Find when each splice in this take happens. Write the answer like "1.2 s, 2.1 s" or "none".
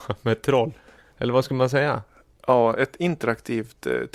none